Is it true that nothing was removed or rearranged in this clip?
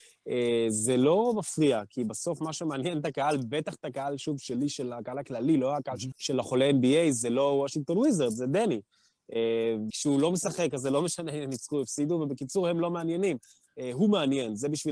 no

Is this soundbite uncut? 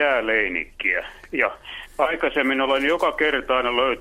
yes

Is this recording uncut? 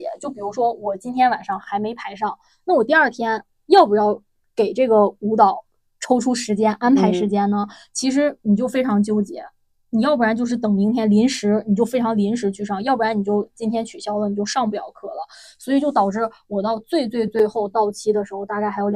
no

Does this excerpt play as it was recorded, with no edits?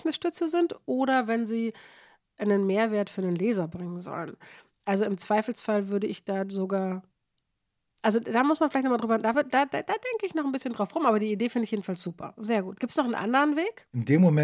yes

